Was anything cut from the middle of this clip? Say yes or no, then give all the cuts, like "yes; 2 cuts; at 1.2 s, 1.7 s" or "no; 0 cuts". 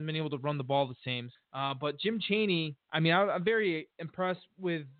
yes; 2 cuts; at 1.3 s, 2.8 s